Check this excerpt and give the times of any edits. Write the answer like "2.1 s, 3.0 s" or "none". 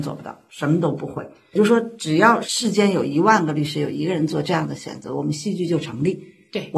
none